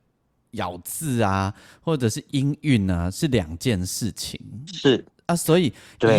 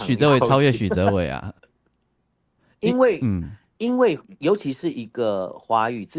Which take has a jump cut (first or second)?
second